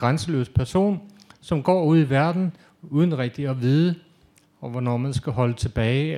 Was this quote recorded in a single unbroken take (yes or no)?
no